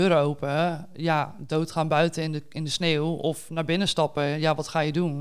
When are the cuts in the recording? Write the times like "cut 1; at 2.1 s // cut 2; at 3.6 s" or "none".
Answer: none

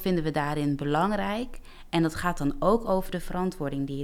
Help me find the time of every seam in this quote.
none

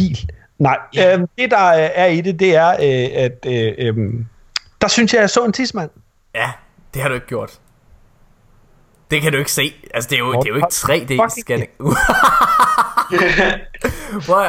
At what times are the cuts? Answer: none

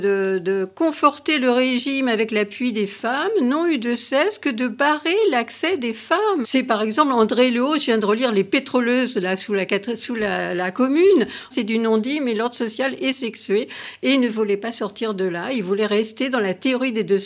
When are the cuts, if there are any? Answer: cut 1; at 6.4 s // cut 2; at 11.5 s

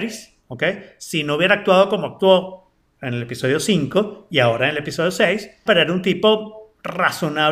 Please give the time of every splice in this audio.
cut 1; at 5.7 s

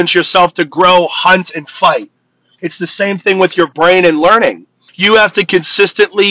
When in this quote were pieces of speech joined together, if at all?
cut 1; at 2.6 s // cut 2; at 4.9 s

